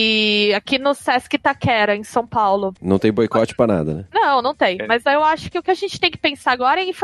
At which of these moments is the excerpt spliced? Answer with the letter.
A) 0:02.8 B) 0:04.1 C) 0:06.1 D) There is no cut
A